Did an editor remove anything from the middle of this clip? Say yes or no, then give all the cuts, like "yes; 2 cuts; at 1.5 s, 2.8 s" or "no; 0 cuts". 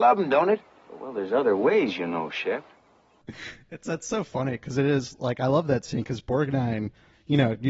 no; 0 cuts